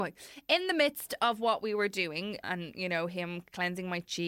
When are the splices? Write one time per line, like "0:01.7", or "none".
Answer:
0:02.4